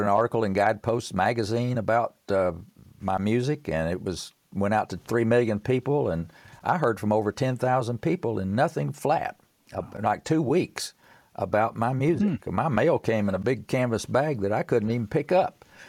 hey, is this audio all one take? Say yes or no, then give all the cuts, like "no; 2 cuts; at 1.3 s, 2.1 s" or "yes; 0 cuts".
yes; 0 cuts